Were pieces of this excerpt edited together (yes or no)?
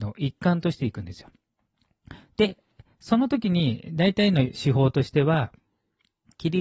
no